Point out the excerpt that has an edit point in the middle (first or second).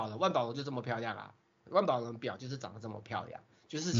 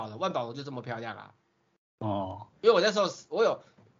first